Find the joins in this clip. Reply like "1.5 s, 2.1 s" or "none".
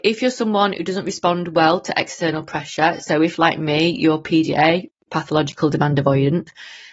none